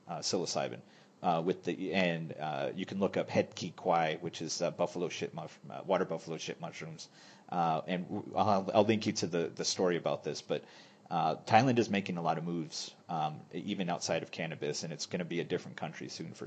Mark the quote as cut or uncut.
uncut